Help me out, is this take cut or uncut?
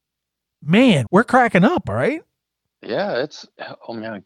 cut